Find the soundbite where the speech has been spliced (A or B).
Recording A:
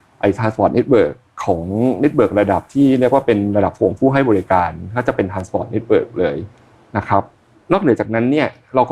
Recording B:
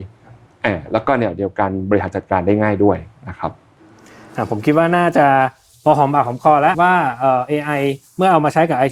B